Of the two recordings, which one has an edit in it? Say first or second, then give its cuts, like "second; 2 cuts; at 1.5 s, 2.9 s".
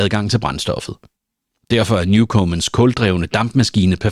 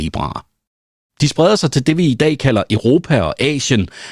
second; 1 cut; at 1.1 s